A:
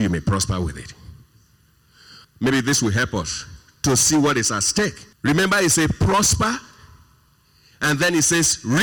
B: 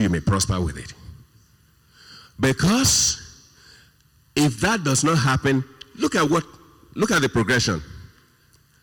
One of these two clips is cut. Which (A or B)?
A